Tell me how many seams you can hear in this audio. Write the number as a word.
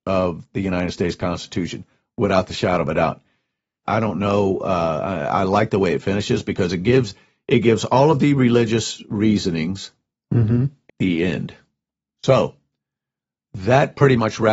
two